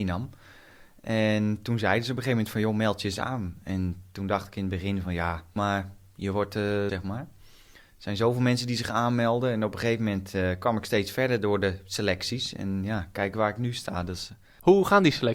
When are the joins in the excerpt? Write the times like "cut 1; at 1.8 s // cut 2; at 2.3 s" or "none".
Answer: cut 1; at 5.6 s // cut 2; at 6.9 s